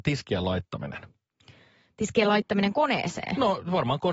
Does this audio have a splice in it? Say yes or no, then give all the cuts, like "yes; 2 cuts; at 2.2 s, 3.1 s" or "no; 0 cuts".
no; 0 cuts